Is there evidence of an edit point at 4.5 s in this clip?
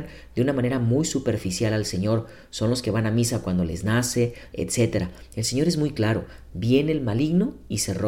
yes; 1 cut; at 4.5 s

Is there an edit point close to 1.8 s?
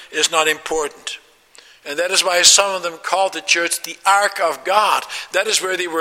yes; 1 cut; at 1.8 s

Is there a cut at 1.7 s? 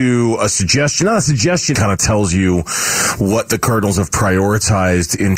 yes; 1 cut; at 1.7 s

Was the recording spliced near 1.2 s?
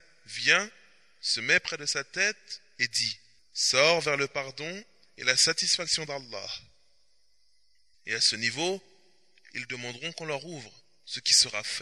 no; 2 cuts; at 3.4 s, 7.9 s

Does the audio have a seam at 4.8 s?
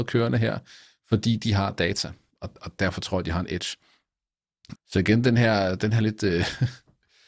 yes; 2 cuts; at 2.3 s, 4.8 s

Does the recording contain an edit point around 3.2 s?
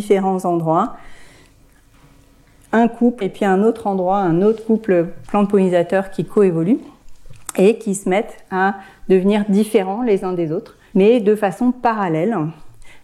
yes; 2 cuts; at 3.2 s, 10.9 s

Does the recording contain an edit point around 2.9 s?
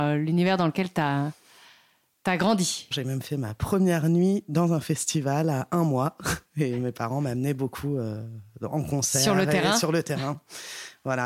yes; 1 cut; at 2.9 s

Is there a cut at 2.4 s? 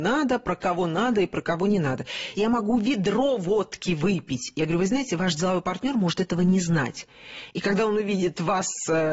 yes; 1 cut; at 2.4 s

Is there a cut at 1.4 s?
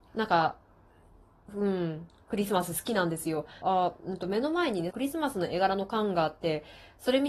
no; 2 cuts; at 3.6 s, 4.9 s

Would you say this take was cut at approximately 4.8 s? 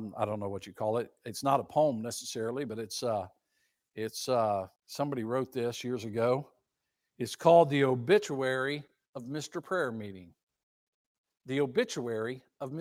yes; 1 cut; at 4.8 s

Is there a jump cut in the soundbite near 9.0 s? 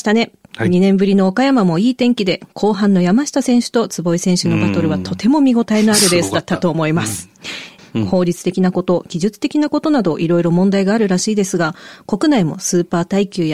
no; 1 cut; at 7.8 s

